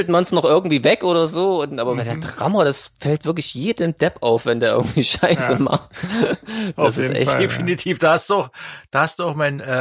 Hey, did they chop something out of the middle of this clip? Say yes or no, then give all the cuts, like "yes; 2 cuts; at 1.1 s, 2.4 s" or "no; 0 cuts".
no; 0 cuts